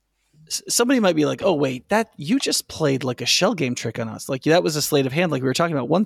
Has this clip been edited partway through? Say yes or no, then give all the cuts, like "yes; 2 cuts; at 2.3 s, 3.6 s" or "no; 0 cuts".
no; 0 cuts